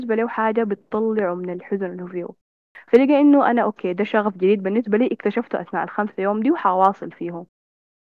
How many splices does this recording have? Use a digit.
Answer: 0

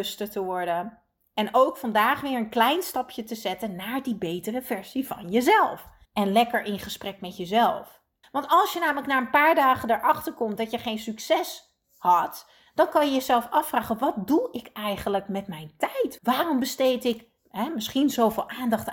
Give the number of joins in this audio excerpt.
3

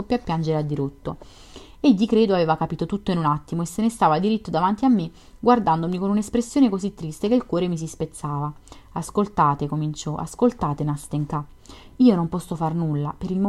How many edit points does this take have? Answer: 0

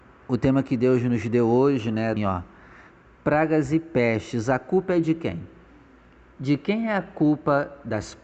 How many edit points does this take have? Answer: 1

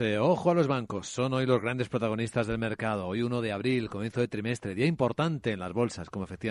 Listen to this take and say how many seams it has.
0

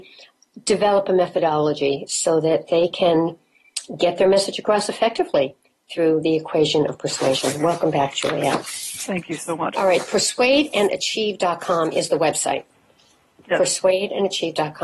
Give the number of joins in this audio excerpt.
1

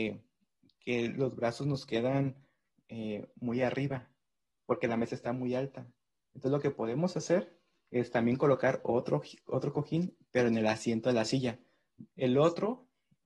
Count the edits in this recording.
1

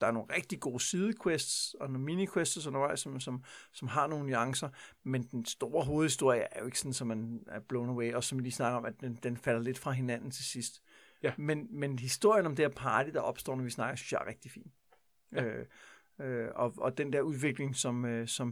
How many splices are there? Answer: 0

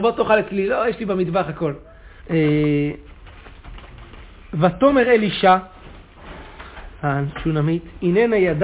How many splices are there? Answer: 1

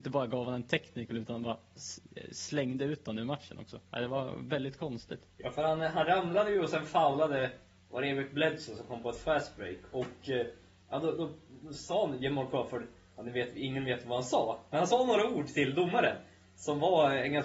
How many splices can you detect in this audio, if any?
0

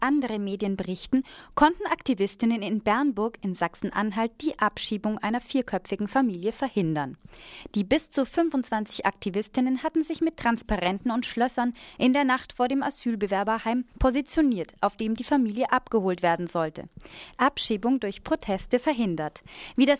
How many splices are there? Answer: 2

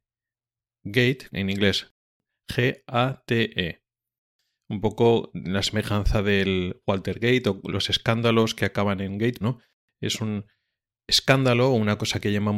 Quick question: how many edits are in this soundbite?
2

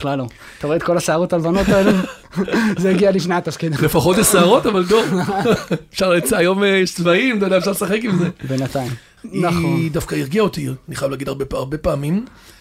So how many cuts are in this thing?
1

